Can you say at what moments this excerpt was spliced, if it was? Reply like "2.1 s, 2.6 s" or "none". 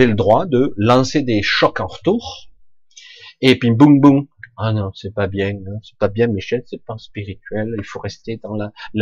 none